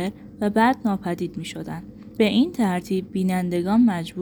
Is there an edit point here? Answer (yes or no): yes